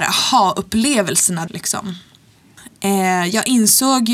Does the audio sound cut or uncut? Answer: cut